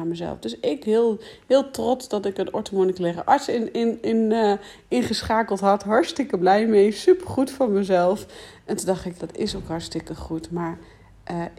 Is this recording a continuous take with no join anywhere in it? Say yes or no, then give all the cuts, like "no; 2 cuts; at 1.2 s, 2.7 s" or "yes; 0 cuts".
no; 1 cut; at 9.2 s